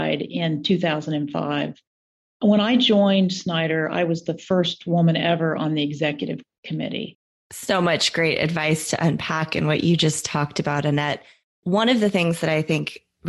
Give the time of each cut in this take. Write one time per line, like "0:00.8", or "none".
0:07.4